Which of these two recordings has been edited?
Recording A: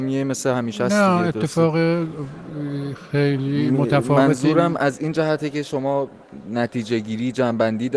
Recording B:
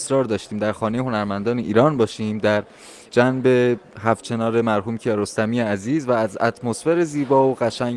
B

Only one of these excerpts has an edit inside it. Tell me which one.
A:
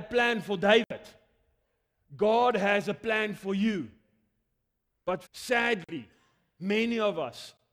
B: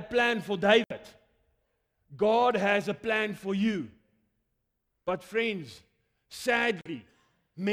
A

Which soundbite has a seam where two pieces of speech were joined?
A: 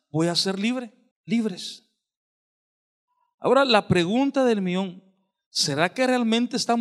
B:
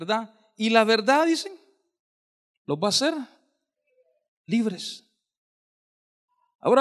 A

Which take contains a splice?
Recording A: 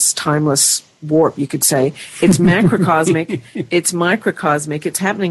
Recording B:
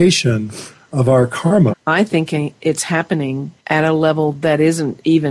B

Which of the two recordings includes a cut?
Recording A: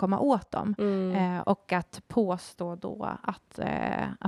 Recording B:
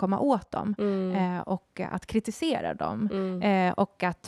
A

